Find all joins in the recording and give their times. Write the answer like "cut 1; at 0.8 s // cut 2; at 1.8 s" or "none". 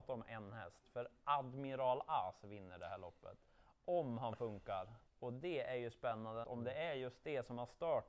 cut 1; at 5.1 s // cut 2; at 6.4 s